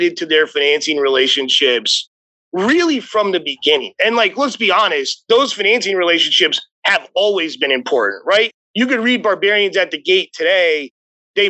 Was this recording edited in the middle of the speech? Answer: no; 0 cuts

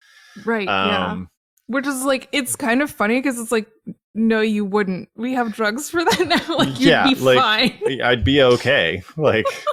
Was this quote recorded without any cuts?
yes; 0 cuts

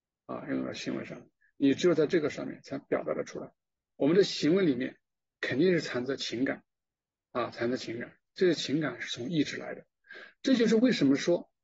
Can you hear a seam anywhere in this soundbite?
yes; 1 cut; at 3.9 s

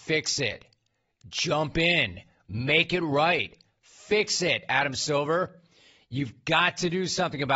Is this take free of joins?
yes; 0 cuts

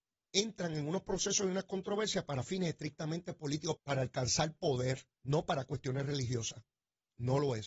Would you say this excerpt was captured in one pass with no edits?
no; 2 cuts; at 3.8 s, 5.1 s

